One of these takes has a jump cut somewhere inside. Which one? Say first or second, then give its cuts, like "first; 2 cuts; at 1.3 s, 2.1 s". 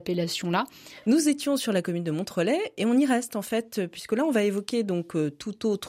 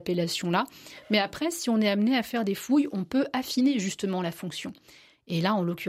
first; 1 cut; at 1.0 s